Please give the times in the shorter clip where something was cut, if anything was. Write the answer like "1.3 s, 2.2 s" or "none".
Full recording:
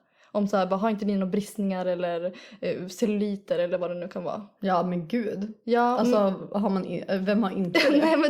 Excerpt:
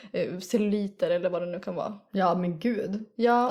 none